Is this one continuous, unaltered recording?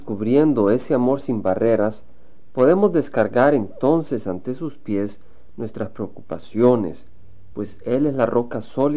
no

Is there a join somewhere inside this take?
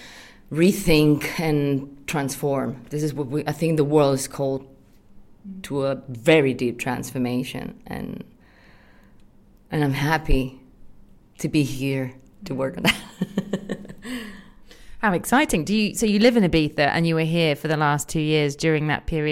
no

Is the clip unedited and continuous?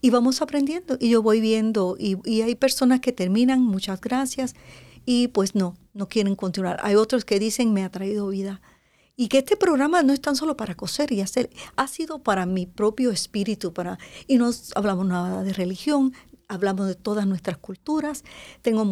yes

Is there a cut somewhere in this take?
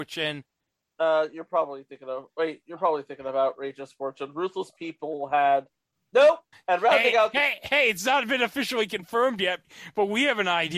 yes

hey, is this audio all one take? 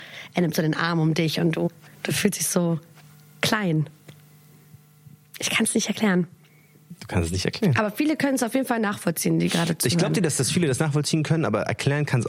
yes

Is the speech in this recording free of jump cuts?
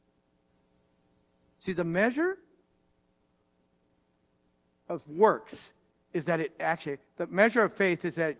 yes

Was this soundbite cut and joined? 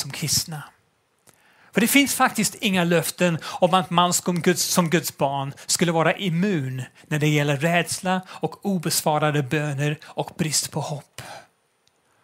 no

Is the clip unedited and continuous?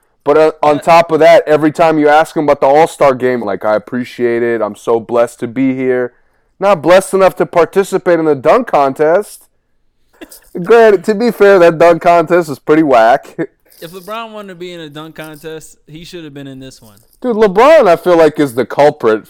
no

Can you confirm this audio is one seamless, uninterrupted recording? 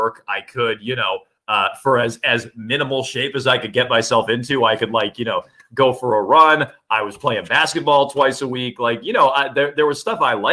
yes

